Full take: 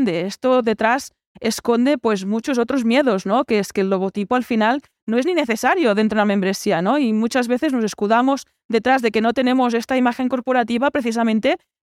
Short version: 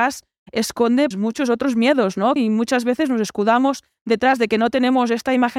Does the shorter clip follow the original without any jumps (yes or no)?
no